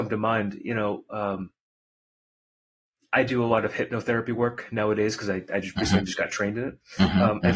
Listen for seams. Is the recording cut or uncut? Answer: uncut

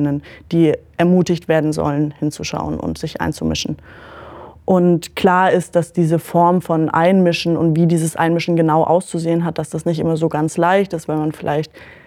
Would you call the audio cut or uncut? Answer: uncut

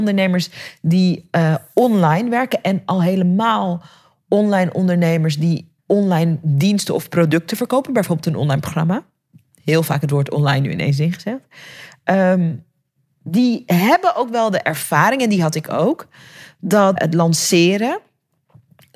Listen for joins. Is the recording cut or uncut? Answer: cut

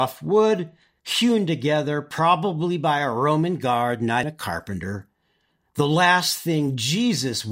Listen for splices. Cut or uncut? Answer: cut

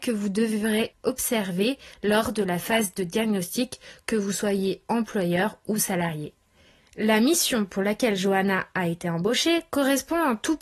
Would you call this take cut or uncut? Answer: cut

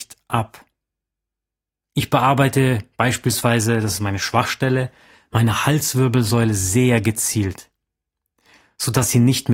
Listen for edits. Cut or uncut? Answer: uncut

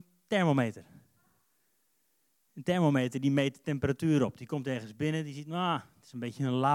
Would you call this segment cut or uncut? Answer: uncut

